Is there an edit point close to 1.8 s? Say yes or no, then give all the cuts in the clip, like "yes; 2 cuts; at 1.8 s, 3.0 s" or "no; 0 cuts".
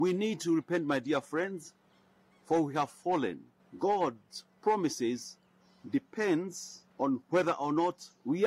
no; 2 cuts; at 3.6 s, 6.9 s